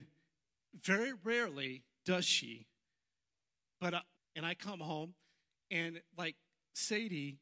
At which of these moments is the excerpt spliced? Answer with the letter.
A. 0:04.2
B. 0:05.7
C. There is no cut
A